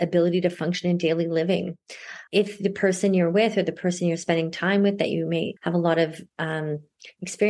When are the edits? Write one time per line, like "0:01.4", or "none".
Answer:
0:02.3
0:05.6